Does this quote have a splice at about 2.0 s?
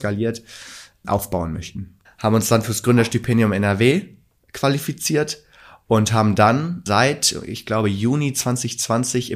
yes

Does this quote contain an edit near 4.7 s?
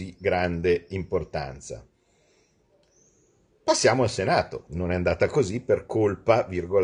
yes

